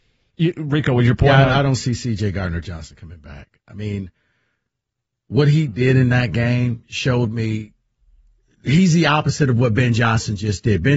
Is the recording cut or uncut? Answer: uncut